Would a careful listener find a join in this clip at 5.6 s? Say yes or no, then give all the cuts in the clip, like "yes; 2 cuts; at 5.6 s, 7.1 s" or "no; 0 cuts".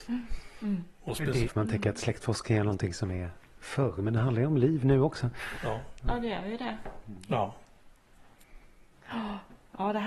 no; 1 cut; at 1.5 s